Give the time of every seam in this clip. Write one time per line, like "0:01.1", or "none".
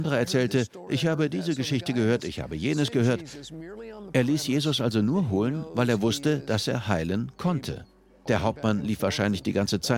0:08.3